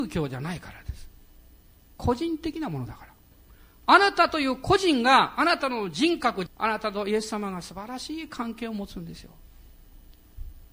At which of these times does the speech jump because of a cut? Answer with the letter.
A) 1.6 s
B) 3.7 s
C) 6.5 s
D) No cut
C